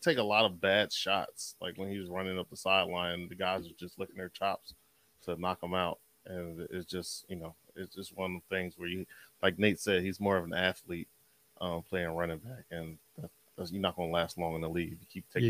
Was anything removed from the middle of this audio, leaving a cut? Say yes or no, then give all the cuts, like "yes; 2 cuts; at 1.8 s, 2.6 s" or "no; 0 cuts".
no; 0 cuts